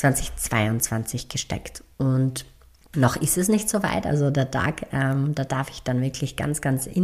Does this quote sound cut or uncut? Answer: uncut